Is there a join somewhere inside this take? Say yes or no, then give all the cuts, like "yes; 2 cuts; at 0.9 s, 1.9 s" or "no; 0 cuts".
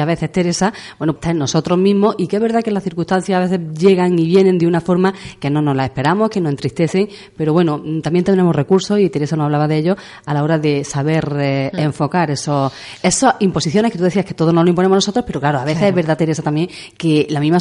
yes; 1 cut; at 1.2 s